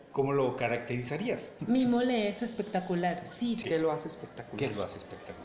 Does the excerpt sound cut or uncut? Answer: cut